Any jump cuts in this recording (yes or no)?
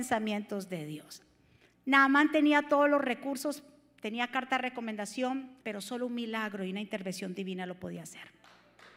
yes